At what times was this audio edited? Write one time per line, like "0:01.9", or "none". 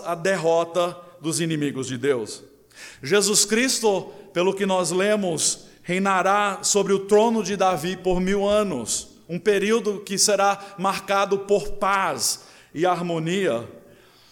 none